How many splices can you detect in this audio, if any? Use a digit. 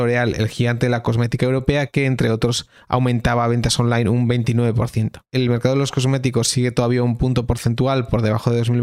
0